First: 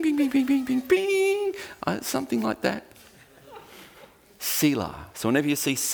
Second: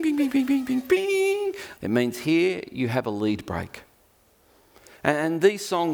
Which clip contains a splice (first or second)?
second